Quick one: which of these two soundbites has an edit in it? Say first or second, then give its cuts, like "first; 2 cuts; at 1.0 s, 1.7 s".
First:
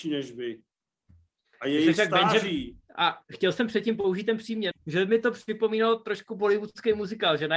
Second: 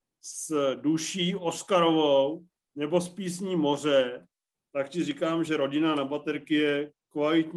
first; 2 cuts; at 2.9 s, 4.7 s